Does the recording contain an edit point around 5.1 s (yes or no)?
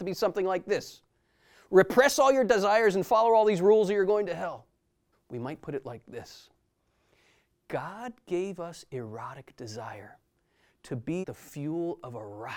yes